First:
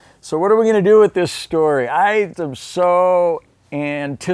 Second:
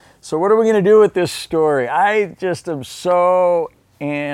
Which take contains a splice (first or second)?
first